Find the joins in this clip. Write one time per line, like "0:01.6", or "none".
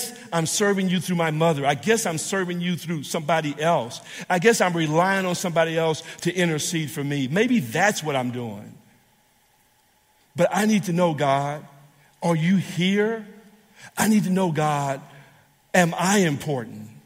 none